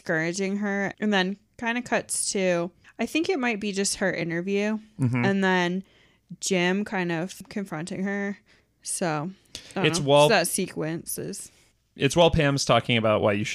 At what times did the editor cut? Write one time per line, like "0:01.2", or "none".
none